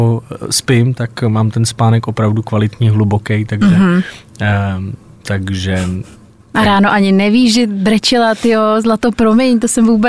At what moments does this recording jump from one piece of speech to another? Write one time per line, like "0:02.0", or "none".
none